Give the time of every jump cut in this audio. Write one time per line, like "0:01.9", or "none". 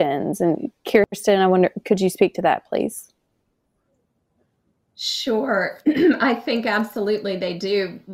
none